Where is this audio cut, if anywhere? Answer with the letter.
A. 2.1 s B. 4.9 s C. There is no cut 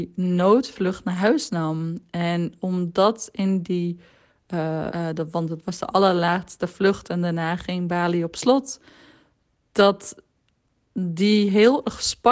B